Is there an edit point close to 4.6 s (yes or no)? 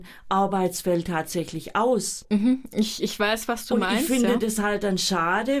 no